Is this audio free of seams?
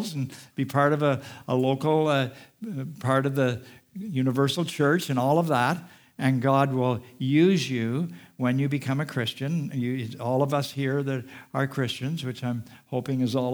yes; 0 cuts

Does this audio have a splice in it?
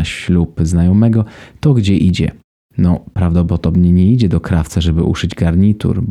no; 0 cuts

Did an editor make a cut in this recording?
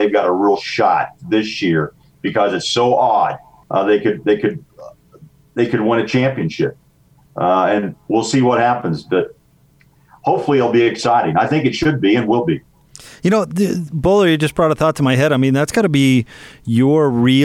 yes; 1 cut; at 3.6 s

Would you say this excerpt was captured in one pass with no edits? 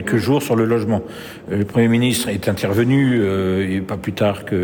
yes; 0 cuts

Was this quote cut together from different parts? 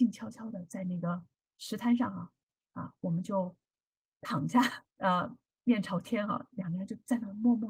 yes; 1 cut; at 4.9 s

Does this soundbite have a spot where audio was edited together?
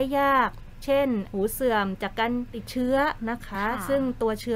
no; 0 cuts

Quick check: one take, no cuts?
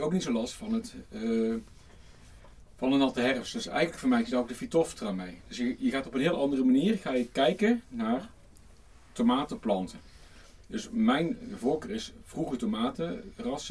yes; 0 cuts

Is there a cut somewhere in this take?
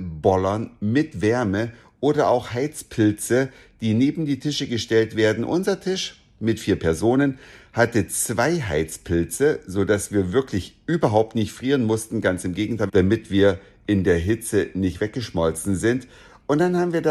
yes; 1 cut; at 12.9 s

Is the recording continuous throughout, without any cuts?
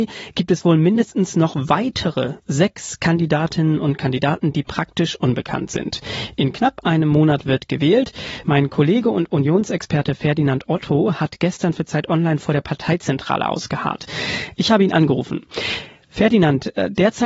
no; 1 cut; at 8.4 s

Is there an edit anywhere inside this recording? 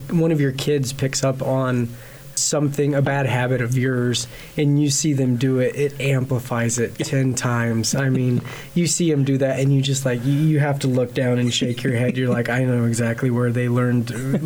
no; 0 cuts

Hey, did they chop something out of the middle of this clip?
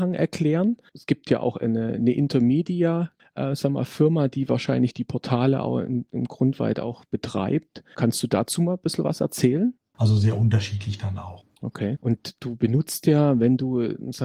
yes; 2 cuts; at 9.9 s, 12.0 s

